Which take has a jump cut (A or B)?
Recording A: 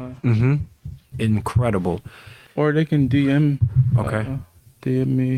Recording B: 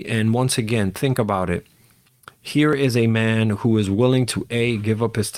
A